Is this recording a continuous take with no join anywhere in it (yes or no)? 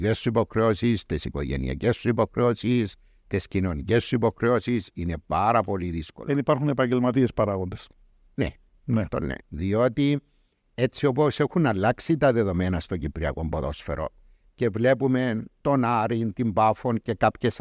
no